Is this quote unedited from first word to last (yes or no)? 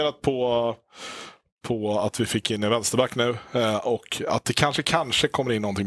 no